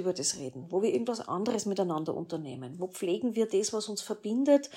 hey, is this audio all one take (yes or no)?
yes